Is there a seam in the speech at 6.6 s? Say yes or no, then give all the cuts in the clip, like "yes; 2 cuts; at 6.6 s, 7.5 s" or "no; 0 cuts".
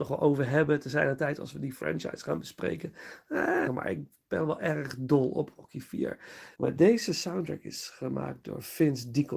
yes; 2 cuts; at 3.7 s, 6.6 s